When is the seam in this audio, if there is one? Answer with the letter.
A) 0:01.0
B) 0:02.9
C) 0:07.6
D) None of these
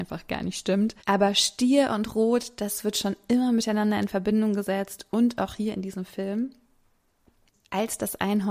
A